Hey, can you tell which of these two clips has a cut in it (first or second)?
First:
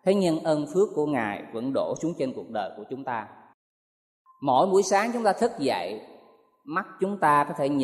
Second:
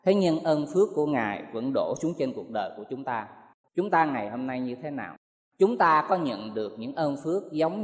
second